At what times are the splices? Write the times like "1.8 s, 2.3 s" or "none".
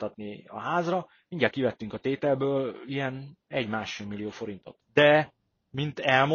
4.8 s